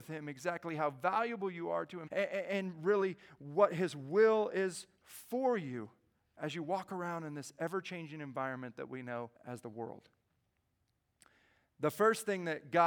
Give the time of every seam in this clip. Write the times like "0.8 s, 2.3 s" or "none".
2.1 s, 9.4 s